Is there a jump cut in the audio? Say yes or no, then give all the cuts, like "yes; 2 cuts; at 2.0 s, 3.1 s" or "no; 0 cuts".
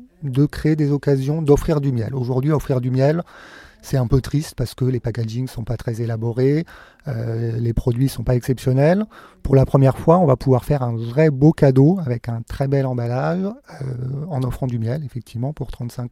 no; 0 cuts